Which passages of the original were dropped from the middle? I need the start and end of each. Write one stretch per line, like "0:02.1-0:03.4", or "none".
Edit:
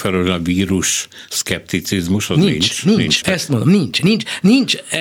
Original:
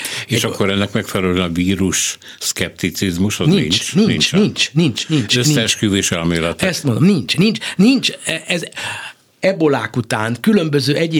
0:04.3-0:06.6